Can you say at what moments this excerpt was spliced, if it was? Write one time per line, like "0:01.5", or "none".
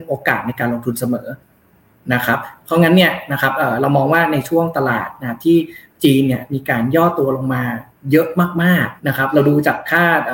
0:09.0